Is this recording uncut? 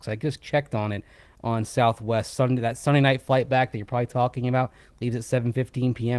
yes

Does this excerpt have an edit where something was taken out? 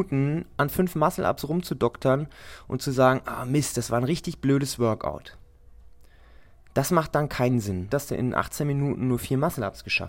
yes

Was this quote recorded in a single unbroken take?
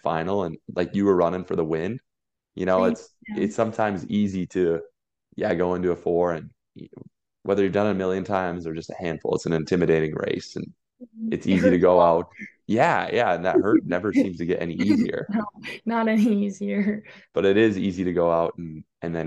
yes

